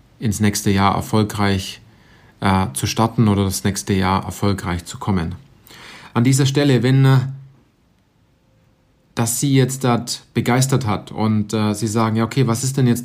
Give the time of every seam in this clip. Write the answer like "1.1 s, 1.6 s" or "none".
none

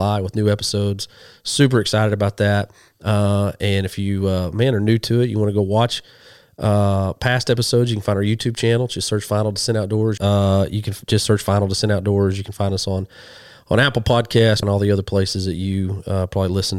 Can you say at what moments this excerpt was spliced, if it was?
10.2 s, 14.6 s

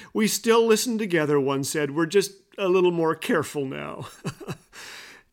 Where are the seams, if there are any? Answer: none

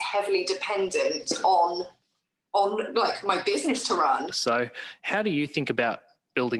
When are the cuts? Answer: 4.3 s

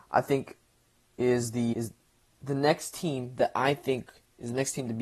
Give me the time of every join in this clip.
1.7 s

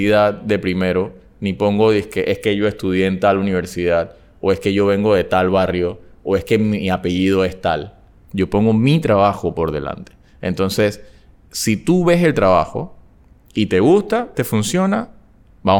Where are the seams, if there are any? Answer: 8.1 s, 14.3 s

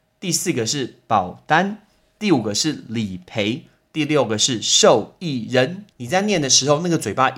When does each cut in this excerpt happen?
5.9 s

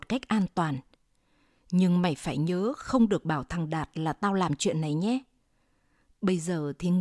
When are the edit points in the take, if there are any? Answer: none

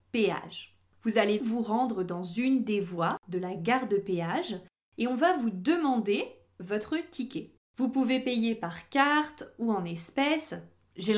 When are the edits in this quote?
1.4 s, 7.6 s

